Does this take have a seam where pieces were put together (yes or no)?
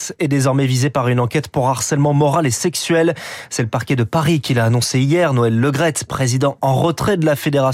no